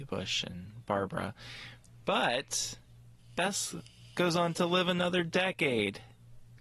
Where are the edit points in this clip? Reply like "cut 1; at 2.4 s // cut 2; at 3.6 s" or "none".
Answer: none